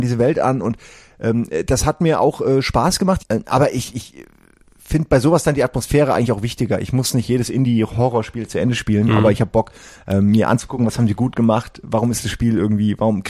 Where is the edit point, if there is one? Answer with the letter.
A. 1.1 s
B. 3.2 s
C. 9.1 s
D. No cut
B